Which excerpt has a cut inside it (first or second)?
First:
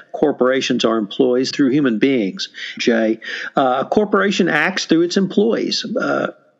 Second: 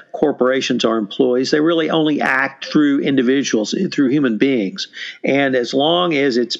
first